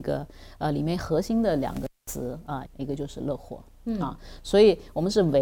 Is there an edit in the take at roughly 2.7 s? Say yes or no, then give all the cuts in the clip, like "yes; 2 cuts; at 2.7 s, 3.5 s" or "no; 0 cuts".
yes; 1 cut; at 2.7 s